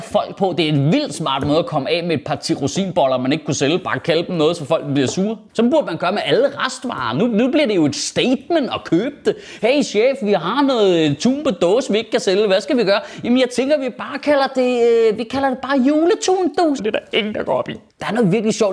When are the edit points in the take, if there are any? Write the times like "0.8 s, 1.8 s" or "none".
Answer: 5.5 s, 16.8 s